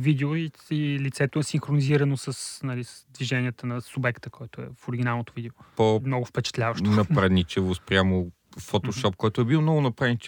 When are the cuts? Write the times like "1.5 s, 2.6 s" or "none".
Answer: 5.7 s